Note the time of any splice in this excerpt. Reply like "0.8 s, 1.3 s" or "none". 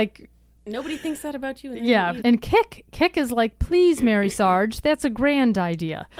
none